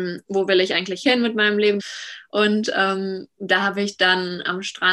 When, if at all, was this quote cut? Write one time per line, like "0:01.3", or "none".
0:01.8